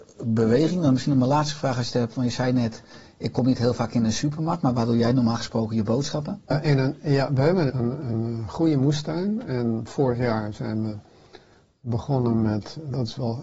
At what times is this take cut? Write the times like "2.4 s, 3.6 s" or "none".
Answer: 6.5 s, 7.7 s